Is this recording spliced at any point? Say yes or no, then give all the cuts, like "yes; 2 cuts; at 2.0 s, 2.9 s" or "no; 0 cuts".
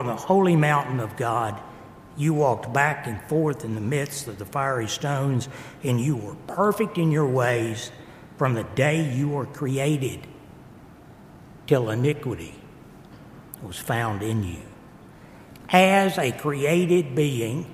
no; 0 cuts